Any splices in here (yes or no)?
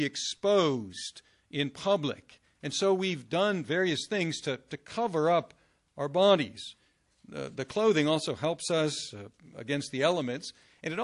no